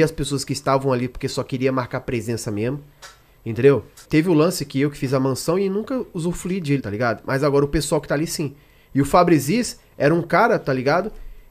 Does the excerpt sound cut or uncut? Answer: cut